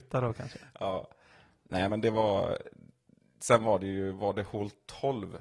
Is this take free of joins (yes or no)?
yes